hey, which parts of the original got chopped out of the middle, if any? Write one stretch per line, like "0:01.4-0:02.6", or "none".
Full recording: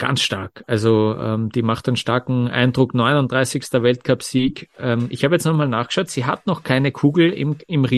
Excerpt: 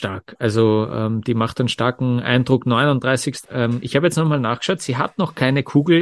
0:03.7-0:04.7

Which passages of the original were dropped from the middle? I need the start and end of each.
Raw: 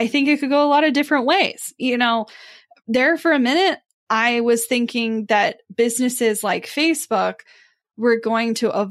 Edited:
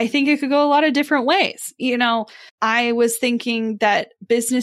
0:02.5-0:04.0

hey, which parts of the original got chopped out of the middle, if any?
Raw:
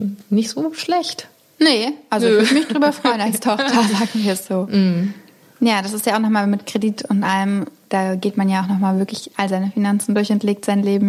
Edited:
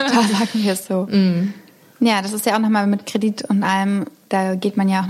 none

